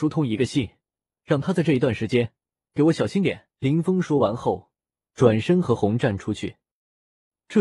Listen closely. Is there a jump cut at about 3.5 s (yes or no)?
yes